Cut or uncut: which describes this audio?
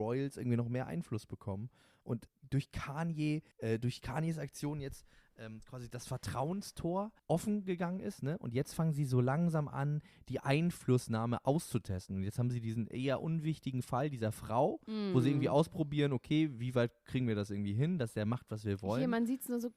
cut